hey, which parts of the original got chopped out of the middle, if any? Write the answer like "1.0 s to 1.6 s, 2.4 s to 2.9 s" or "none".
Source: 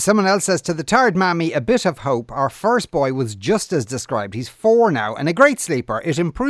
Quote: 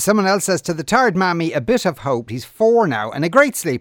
2.3 s to 4.3 s